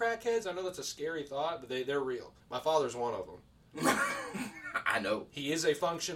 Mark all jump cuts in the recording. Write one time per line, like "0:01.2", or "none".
0:02.4